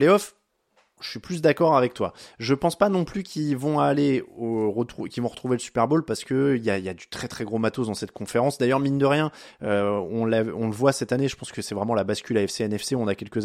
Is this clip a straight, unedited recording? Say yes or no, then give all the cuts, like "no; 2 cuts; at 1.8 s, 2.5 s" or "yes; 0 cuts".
yes; 0 cuts